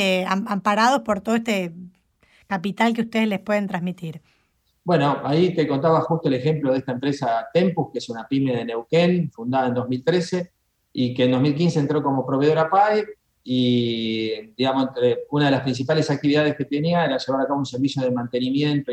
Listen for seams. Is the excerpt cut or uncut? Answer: uncut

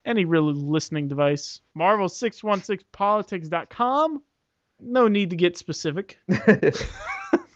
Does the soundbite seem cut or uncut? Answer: cut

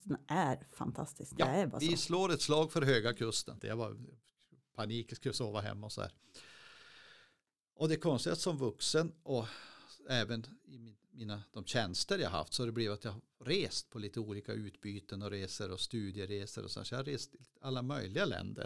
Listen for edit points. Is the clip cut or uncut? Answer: cut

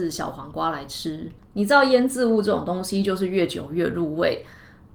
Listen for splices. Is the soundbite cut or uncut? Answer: uncut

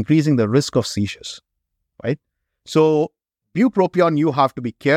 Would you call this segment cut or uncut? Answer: uncut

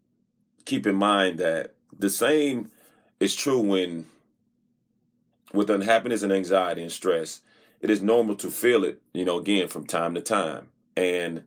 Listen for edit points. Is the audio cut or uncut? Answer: uncut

